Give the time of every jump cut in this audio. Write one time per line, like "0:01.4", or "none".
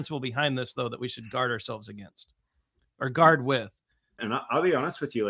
0:04.2

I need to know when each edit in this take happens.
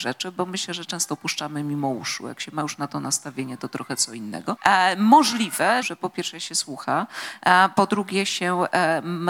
0:04.6
0:05.8

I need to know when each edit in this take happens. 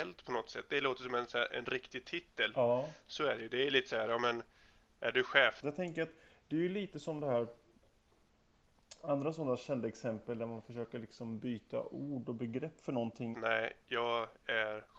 0:05.6
0:13.3

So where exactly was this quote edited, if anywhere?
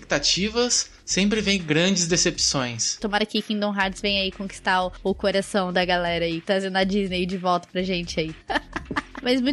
0:03.0
0:08.4

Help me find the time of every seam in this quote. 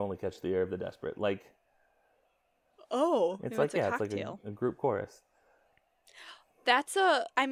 none

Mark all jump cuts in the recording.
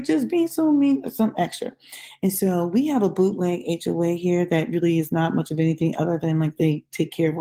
none

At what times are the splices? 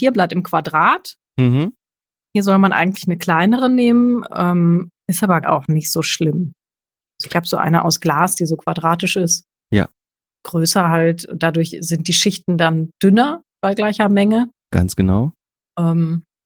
0:05.4

